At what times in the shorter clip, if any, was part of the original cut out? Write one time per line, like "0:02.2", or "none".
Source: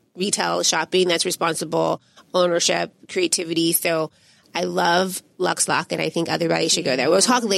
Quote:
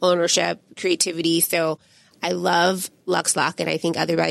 none